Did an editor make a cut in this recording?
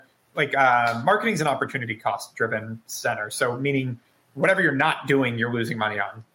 no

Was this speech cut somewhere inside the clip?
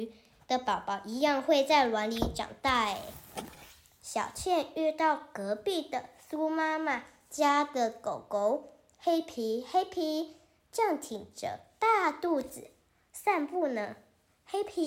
no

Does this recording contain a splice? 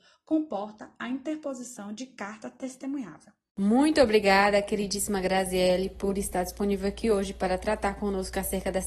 no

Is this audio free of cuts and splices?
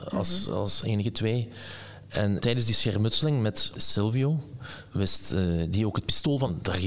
no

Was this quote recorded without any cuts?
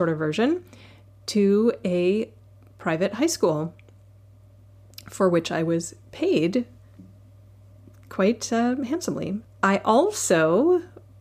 no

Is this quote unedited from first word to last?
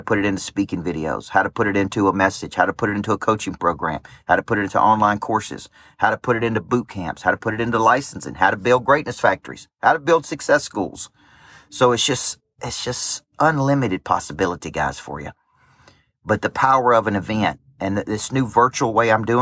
yes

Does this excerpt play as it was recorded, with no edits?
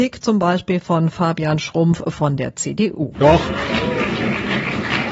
no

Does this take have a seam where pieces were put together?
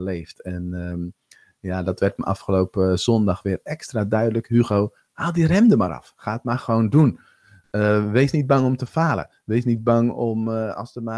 no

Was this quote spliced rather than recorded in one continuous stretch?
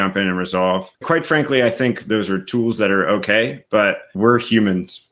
yes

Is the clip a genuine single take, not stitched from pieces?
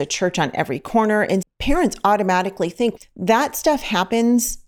no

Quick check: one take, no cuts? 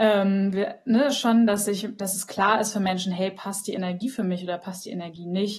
no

